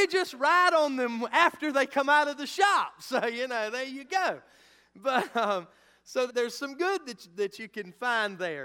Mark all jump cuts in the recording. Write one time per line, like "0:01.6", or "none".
0:06.3